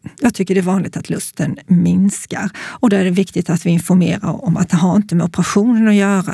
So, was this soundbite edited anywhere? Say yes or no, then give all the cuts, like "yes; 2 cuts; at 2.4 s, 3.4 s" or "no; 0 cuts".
no; 0 cuts